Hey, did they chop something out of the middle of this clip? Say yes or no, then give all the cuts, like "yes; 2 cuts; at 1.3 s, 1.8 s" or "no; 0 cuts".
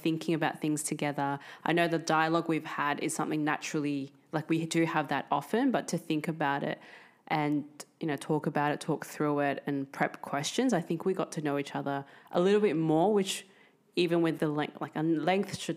yes; 1 cut; at 14.4 s